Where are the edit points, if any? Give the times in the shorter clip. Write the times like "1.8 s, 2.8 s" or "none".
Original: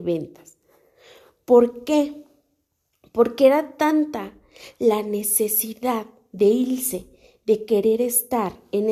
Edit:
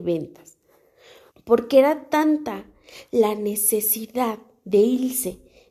1.3 s